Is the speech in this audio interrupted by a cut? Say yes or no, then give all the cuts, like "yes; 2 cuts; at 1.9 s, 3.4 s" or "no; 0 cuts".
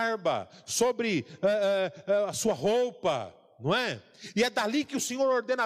no; 0 cuts